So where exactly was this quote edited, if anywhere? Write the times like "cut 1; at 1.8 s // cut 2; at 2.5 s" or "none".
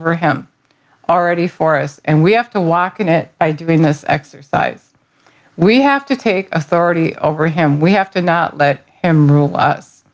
none

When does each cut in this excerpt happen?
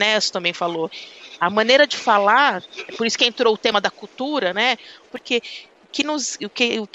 cut 1; at 5.1 s

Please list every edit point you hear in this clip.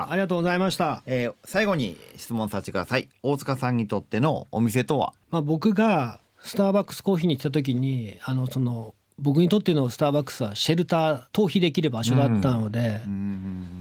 cut 1; at 5.2 s // cut 2; at 11.2 s

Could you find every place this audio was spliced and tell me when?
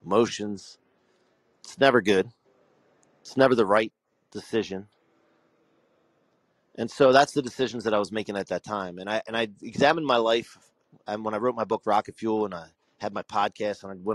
none

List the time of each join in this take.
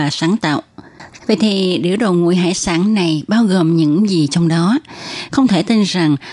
cut 1; at 1.2 s // cut 2; at 5.3 s

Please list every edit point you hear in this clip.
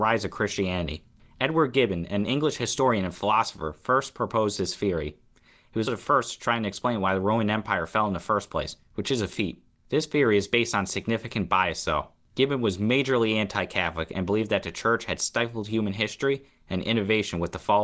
cut 1; at 5.8 s

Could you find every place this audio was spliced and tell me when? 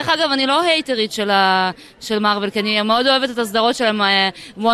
none

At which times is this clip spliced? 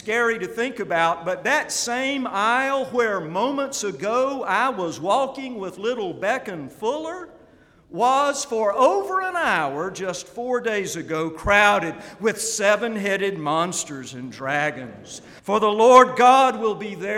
cut 1; at 15.4 s

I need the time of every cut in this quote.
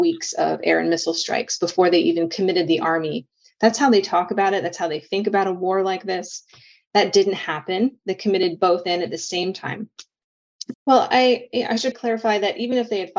cut 1; at 10.7 s // cut 2; at 11.9 s

